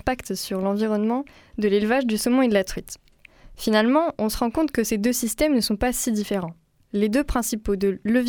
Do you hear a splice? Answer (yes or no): no